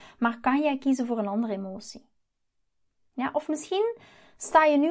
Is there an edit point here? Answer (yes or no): no